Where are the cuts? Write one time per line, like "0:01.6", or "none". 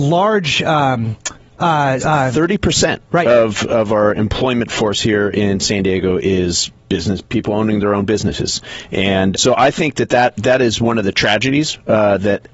0:02.0
0:09.3